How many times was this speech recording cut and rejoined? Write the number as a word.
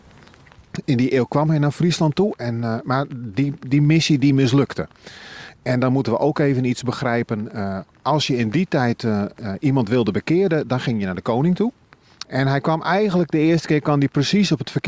one